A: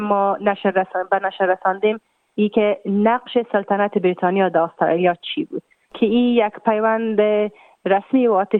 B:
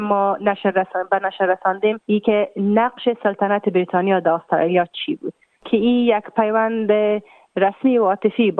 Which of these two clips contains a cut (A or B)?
B